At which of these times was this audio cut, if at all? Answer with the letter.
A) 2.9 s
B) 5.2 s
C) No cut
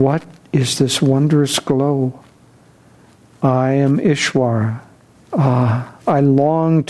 B